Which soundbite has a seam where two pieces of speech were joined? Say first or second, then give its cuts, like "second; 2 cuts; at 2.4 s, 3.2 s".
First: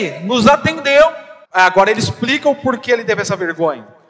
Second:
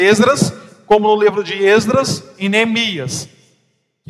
first; 1 cut; at 1.5 s